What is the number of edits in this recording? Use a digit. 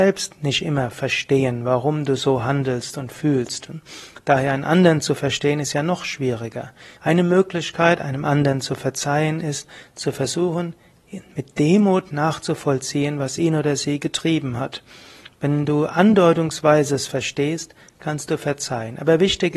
1